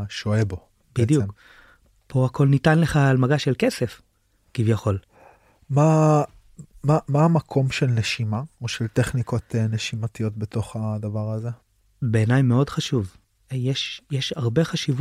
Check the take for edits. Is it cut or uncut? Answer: uncut